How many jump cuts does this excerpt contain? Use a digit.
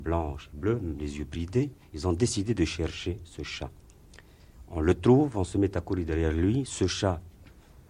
0